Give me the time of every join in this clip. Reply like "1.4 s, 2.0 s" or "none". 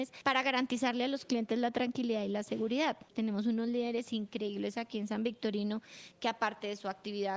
3.1 s

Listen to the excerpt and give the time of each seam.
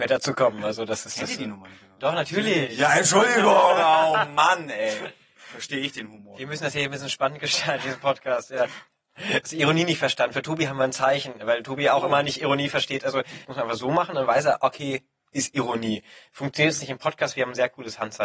13.4 s

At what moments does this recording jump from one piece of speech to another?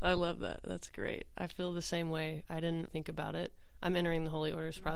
2.9 s

